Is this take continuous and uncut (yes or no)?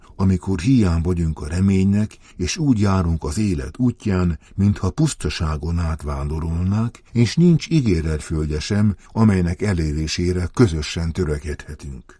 yes